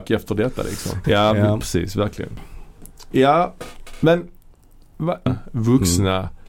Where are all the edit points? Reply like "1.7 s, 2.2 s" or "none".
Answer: 1.0 s, 5.3 s